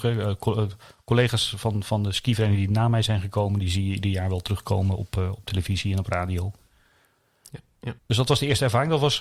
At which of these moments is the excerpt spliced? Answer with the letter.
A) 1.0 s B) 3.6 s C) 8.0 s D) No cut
C